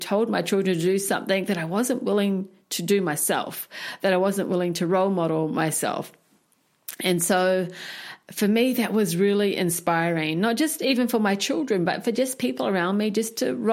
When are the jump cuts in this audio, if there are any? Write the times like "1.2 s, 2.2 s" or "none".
none